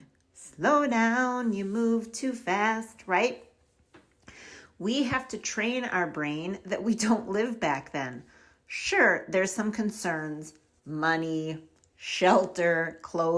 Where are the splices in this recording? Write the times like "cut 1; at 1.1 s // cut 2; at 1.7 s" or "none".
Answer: none